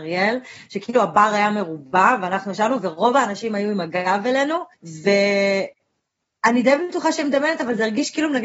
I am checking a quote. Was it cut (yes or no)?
yes